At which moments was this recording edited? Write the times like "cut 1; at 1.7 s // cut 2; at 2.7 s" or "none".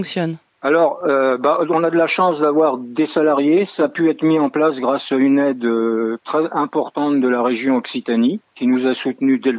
none